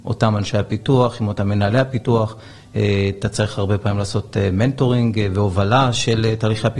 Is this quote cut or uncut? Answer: uncut